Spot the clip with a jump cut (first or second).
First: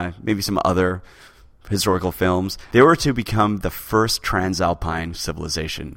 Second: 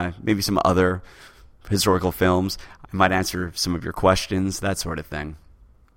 first